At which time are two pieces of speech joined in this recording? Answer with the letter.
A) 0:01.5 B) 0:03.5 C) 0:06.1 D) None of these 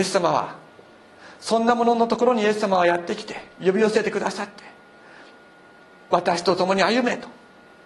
B